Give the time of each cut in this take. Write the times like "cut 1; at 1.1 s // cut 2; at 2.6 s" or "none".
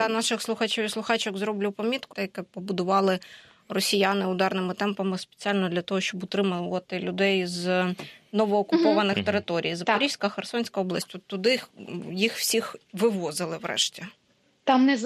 cut 1; at 2.1 s